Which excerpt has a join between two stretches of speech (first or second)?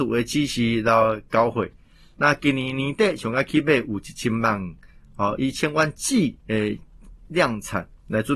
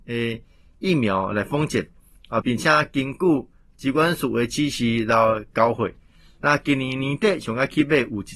second